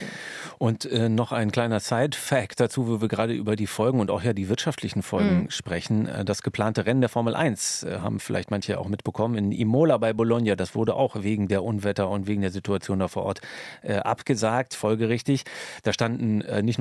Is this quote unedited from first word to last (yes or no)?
yes